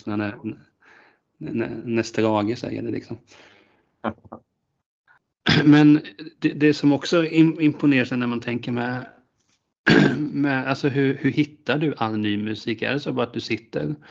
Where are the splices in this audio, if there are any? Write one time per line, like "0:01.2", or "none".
none

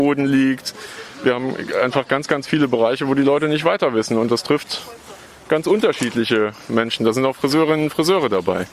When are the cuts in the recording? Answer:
none

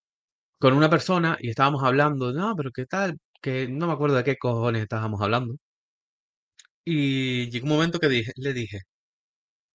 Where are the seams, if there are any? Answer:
none

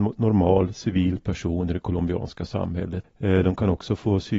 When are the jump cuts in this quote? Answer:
0:03.0

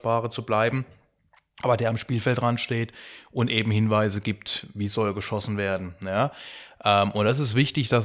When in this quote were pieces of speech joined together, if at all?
none

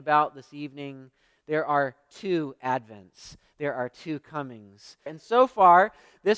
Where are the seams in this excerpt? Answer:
0:05.1

